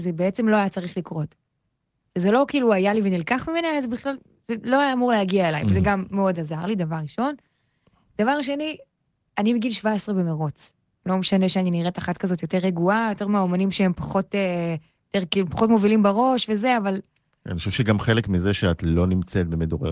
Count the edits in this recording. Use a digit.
0